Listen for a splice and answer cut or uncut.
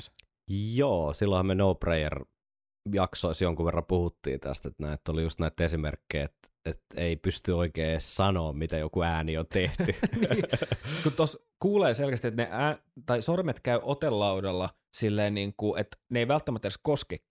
uncut